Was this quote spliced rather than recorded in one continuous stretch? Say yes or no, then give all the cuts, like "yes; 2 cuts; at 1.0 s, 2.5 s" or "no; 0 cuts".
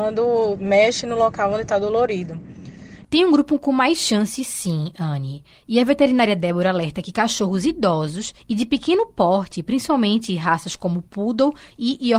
yes; 1 cut; at 3.0 s